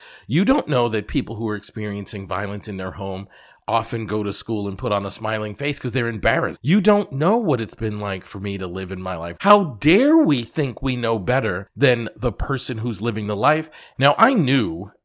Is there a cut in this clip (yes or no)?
yes